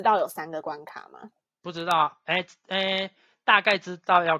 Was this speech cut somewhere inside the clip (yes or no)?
no